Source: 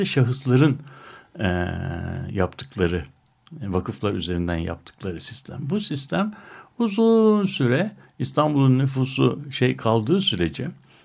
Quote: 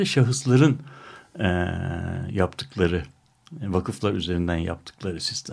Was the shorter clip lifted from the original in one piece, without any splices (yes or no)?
yes